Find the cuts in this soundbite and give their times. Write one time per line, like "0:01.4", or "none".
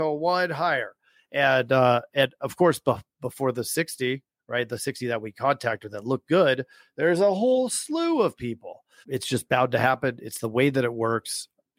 0:09.0